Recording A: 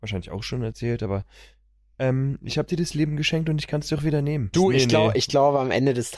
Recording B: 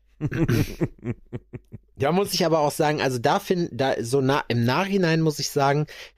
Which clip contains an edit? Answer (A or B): A